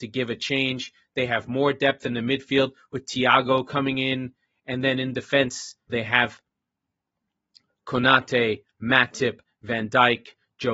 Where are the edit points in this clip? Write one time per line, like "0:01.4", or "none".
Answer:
0:05.9